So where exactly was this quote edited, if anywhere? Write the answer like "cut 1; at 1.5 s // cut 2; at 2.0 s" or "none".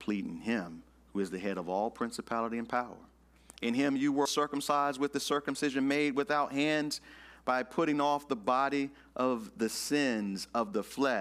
cut 1; at 4.3 s